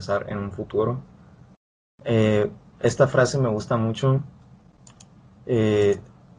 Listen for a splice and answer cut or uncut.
uncut